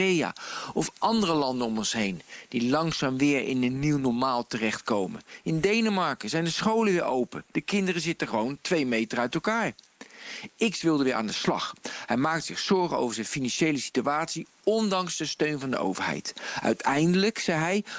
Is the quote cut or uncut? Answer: uncut